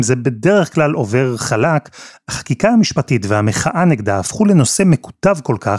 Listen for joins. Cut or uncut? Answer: uncut